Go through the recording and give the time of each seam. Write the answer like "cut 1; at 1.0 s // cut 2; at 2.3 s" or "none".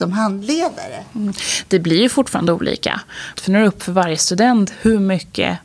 cut 1; at 3.3 s